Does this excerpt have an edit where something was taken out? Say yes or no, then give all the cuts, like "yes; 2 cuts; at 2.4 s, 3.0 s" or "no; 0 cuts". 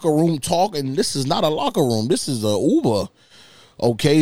no; 0 cuts